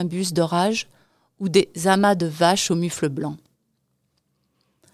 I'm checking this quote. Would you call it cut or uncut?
uncut